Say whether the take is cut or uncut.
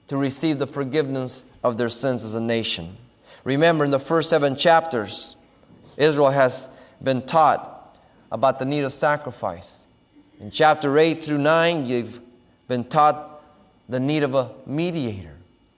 uncut